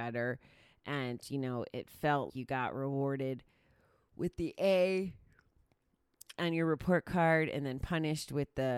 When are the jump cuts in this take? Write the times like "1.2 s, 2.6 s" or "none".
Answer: 2.3 s